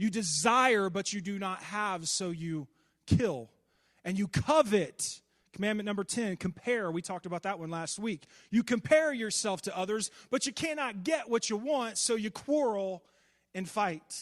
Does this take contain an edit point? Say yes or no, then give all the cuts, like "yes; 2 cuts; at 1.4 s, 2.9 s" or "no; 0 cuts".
no; 0 cuts